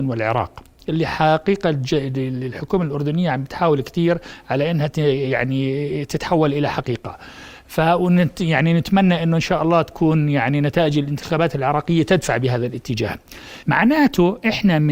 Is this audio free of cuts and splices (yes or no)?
no